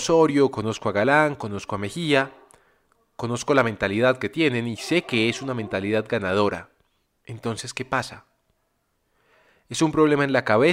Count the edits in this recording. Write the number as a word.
one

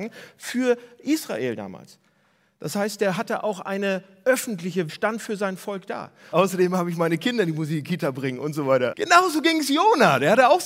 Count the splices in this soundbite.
three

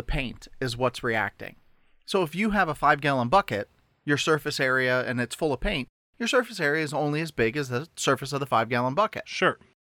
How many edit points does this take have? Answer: zero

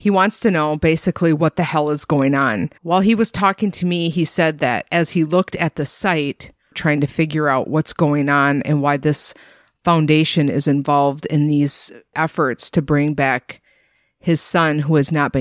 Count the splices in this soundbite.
one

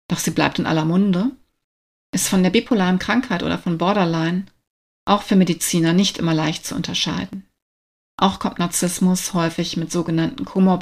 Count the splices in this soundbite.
one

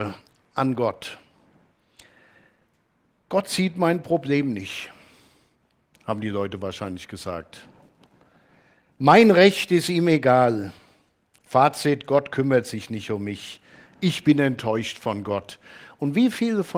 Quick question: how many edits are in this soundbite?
zero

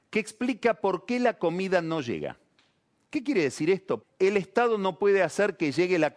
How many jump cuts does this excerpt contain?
one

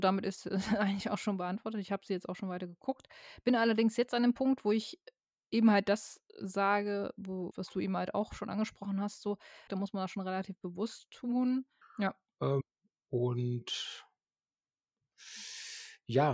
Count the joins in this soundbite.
three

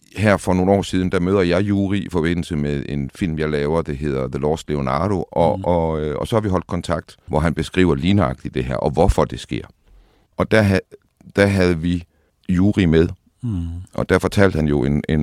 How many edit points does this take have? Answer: two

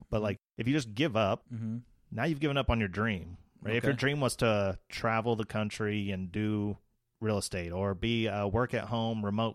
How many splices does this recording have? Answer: zero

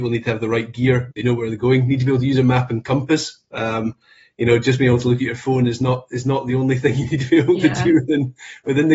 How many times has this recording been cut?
one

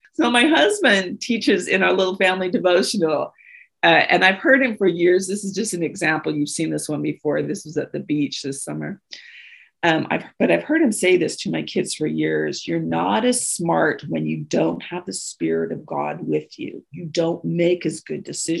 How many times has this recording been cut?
zero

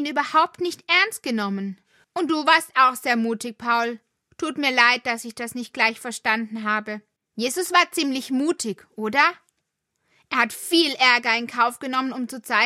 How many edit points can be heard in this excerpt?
two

